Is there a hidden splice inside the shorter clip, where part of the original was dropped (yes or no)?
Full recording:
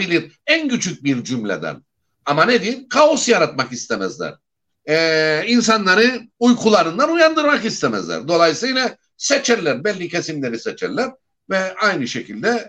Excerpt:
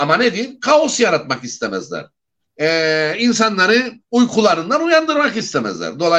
no